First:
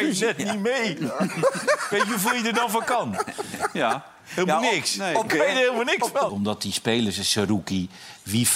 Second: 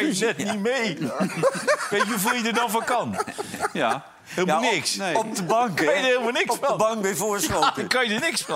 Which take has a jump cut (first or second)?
first